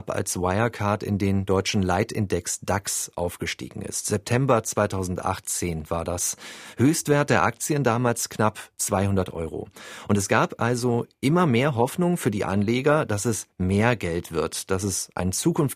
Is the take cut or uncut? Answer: uncut